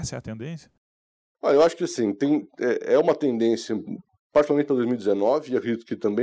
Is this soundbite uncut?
yes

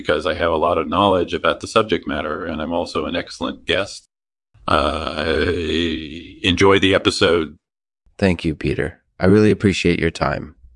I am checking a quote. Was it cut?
no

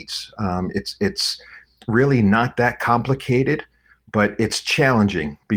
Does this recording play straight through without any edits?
yes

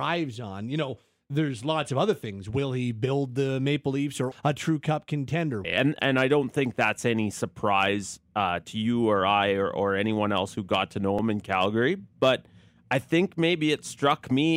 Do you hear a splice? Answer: yes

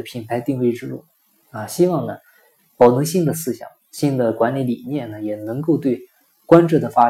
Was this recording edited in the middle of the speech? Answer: no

